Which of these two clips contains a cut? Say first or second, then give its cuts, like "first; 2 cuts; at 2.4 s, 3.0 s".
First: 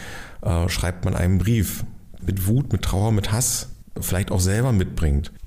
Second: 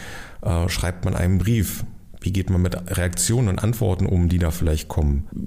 first; 2 cuts; at 2.2 s, 4.0 s